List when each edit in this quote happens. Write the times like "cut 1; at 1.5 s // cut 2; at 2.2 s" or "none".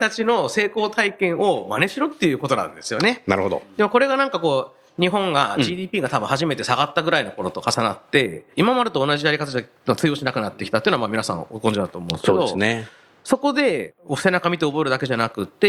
cut 1; at 8.5 s